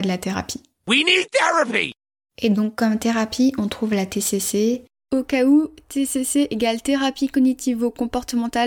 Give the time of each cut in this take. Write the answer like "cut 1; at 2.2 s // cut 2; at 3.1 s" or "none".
none